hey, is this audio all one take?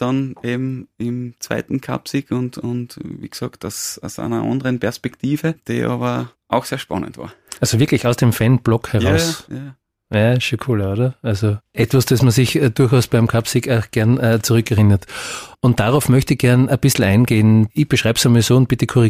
no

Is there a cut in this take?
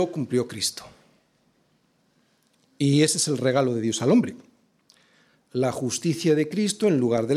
no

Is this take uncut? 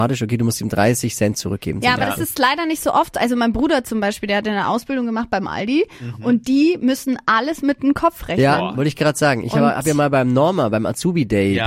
yes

